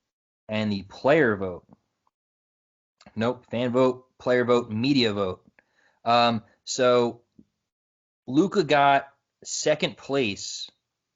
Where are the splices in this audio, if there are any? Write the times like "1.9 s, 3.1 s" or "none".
none